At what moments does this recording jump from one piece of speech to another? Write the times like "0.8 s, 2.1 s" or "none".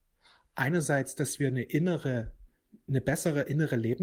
none

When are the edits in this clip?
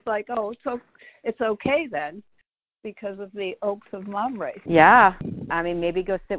4.7 s

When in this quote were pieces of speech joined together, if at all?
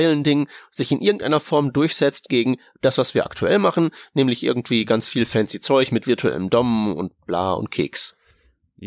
none

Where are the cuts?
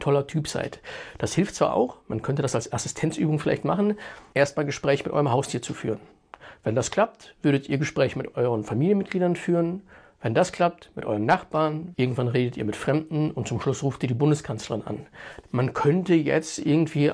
4.3 s, 11.9 s, 15.4 s

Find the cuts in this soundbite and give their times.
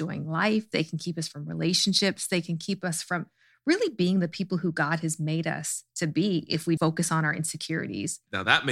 6.8 s

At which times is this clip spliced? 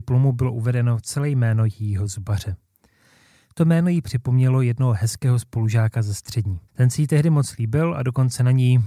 6.7 s

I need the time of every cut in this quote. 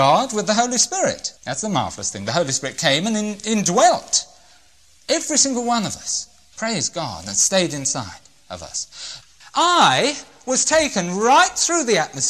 1.4 s, 9.4 s

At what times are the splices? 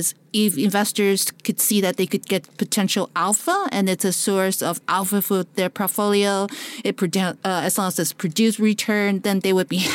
none

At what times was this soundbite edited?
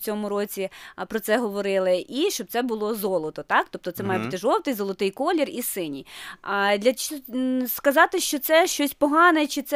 none

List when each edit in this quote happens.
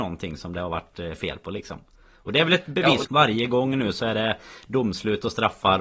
3.0 s

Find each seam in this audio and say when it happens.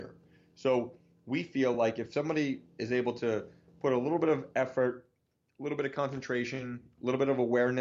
none

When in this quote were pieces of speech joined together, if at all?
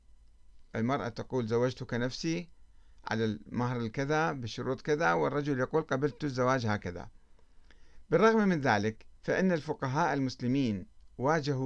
9.2 s

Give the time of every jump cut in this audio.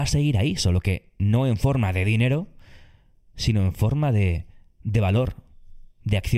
none

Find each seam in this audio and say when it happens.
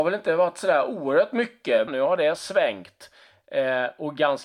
1.9 s

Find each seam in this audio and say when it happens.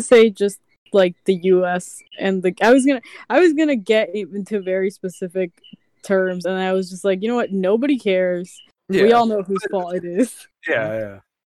none

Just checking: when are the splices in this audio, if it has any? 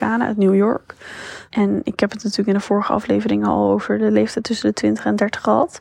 1.5 s

